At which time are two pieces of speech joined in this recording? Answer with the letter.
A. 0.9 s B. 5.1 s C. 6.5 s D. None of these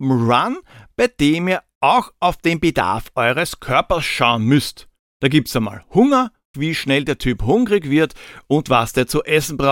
C